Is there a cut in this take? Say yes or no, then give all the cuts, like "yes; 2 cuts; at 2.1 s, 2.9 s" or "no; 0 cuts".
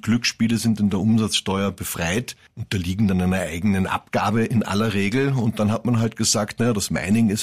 no; 0 cuts